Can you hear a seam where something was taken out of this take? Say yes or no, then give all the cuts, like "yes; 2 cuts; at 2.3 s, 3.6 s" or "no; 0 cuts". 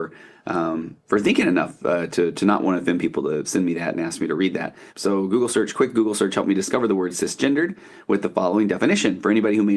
yes; 2 cuts; at 3.4 s, 4.9 s